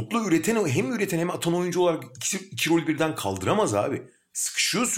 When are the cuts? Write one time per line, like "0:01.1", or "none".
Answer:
none